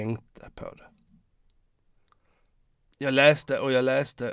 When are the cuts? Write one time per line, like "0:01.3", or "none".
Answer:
0:02.9